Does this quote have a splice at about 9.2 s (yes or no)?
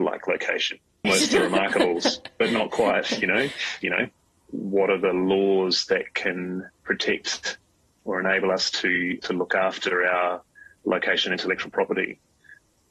yes